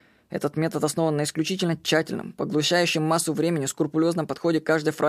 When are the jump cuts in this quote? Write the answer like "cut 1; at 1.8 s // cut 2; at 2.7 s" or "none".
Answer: none